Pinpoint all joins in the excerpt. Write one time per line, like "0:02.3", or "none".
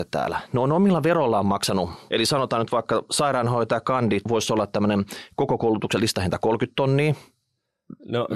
0:02.1
0:04.2